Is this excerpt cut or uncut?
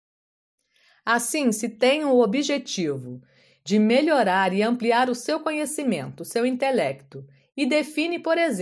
uncut